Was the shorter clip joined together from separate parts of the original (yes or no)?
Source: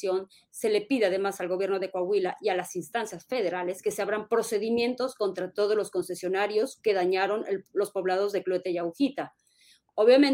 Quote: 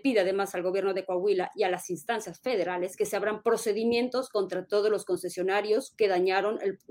no